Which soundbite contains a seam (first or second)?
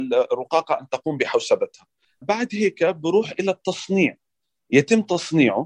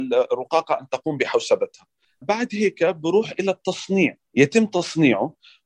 second